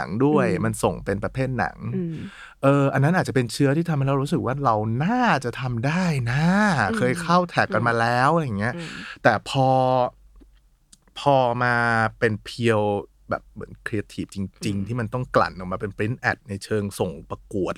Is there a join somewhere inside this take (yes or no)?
no